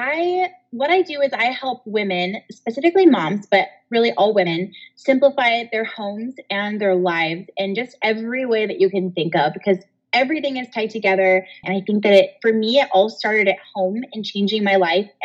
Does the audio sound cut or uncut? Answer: cut